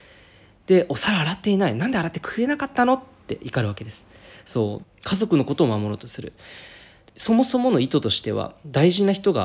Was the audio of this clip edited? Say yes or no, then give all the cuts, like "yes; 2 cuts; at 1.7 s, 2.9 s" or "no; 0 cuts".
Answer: yes; 2 cuts; at 4.8 s, 7.1 s